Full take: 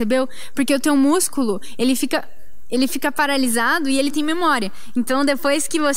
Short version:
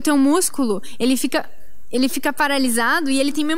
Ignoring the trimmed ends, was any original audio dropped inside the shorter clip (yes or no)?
no